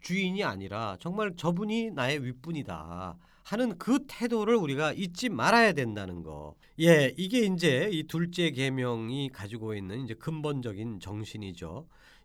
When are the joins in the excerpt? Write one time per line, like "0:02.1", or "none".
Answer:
0:06.6